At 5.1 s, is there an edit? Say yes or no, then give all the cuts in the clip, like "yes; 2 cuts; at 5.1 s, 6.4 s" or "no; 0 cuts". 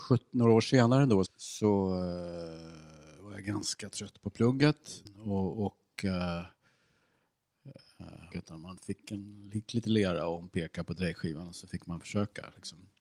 yes; 3 cuts; at 1.3 s, 5.1 s, 8.3 s